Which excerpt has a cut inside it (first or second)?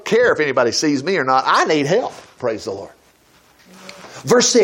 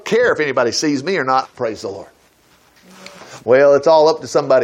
second